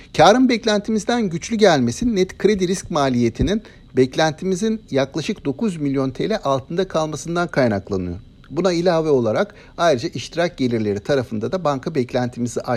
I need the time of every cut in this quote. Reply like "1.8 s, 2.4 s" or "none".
none